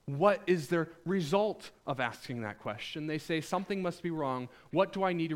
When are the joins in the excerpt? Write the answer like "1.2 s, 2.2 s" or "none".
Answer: none